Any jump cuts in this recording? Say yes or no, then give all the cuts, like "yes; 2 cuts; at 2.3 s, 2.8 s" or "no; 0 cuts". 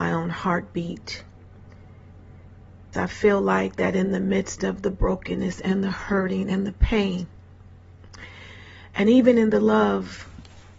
yes; 1 cut; at 2.9 s